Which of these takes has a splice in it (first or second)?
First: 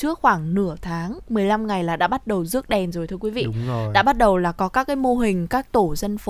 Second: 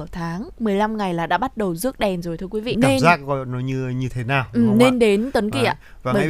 second